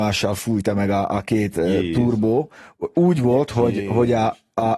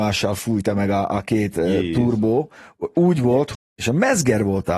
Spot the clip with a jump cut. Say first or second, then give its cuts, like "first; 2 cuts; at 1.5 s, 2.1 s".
second; 1 cut; at 3.5 s